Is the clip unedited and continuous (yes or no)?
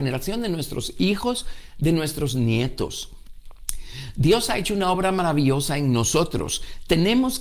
yes